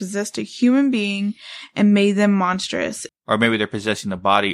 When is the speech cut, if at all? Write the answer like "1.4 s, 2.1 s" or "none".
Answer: 3.1 s